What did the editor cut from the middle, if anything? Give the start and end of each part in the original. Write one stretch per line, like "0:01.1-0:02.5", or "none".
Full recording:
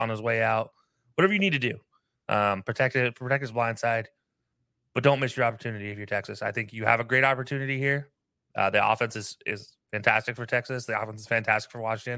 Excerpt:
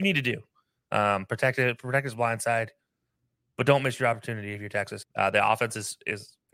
0:06.4-0:08.4